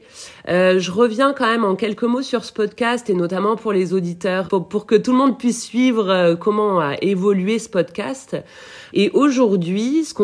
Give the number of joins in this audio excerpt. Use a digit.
2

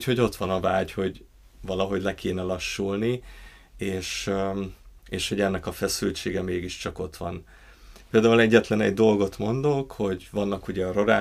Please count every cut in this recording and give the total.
1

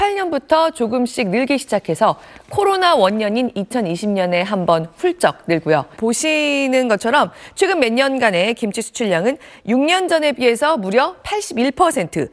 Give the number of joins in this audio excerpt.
1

